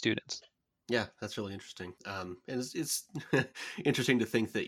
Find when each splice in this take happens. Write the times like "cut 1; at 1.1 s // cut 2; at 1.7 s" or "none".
cut 1; at 2.0 s